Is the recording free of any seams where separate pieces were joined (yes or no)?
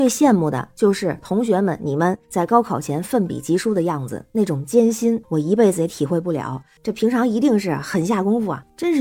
no